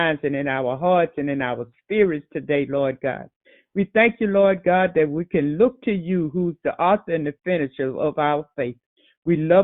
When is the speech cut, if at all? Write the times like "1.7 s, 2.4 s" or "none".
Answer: none